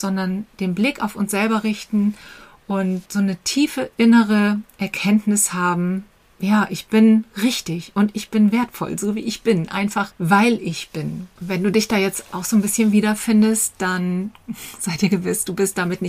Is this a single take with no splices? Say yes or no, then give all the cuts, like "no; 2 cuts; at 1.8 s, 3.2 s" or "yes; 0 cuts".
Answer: yes; 0 cuts